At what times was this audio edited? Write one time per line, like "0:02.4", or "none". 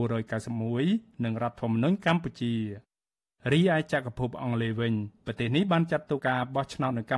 0:06.2